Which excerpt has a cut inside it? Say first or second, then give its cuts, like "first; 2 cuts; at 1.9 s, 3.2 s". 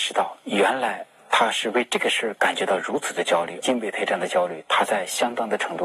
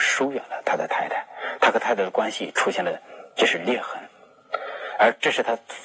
first; 1 cut; at 3.6 s